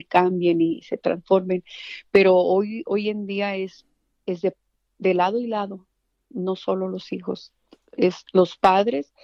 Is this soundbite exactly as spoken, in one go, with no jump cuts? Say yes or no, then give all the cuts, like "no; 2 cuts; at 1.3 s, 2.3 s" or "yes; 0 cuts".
yes; 0 cuts